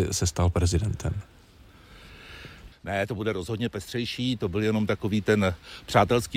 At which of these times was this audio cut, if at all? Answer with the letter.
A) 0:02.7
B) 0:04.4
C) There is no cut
A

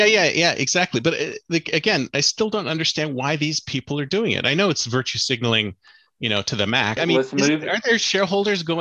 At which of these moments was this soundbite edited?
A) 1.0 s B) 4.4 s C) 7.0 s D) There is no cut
C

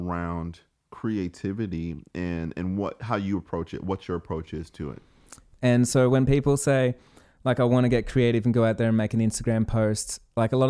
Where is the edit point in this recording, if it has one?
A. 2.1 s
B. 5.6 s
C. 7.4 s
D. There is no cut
B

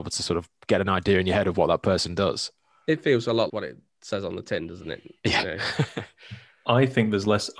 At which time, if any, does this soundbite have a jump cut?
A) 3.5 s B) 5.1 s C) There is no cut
A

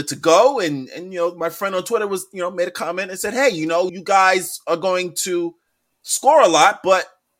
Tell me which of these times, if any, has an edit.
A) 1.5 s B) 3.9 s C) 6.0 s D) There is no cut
B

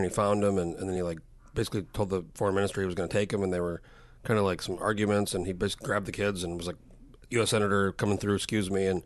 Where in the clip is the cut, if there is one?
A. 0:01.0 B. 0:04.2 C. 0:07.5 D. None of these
D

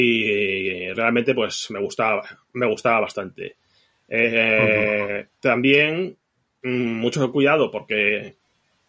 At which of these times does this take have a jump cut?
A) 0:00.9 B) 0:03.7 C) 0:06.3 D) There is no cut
D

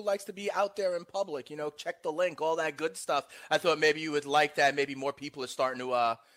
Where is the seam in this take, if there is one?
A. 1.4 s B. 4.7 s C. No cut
C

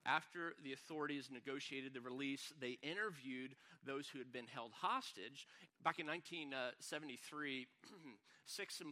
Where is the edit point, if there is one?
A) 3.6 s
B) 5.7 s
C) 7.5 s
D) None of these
B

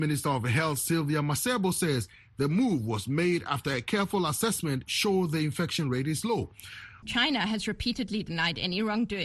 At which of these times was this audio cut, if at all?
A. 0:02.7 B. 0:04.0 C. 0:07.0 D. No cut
C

